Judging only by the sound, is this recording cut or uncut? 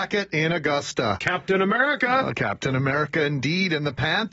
uncut